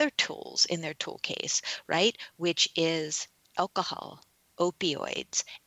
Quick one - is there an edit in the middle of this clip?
yes; 1 cut; at 4.5 s

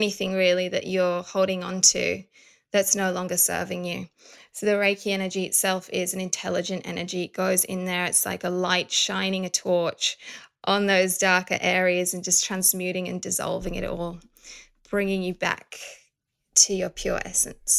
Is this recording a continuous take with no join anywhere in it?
yes; 0 cuts

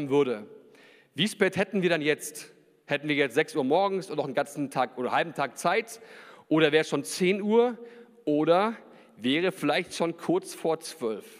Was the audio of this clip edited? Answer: no; 0 cuts

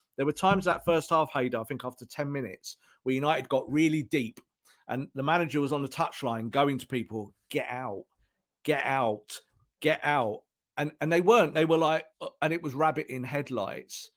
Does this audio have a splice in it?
no; 0 cuts

